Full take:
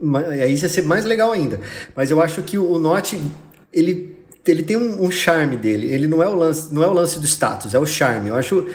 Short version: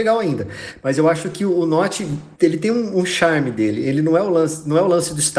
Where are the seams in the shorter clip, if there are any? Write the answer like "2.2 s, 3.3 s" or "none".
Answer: 2.3 s